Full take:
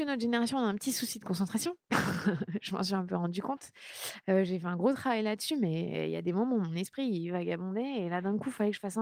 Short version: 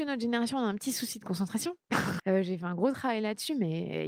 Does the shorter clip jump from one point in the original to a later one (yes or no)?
yes